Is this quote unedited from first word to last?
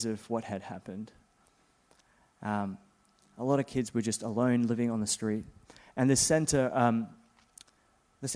yes; 0 cuts

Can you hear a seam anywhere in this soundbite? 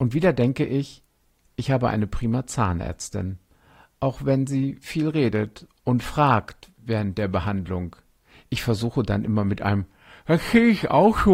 no; 0 cuts

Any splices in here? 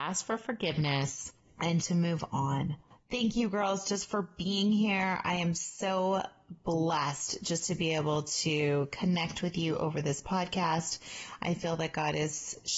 no; 0 cuts

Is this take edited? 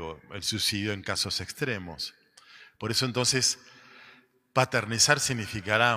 no; 0 cuts

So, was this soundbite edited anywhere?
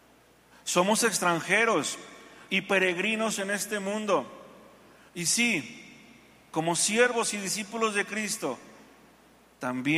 yes; 1 cut; at 5.1 s

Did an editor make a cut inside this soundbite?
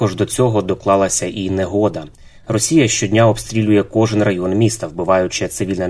no; 0 cuts

